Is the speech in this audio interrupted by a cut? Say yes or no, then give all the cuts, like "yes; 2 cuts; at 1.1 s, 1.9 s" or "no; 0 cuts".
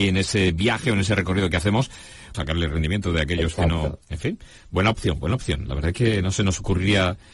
yes; 1 cut; at 2.3 s